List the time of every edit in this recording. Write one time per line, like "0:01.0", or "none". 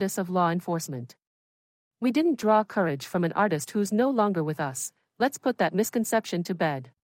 none